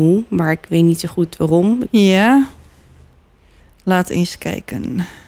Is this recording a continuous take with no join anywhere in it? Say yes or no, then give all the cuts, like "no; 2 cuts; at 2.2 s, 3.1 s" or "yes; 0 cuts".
no; 1 cut; at 1.8 s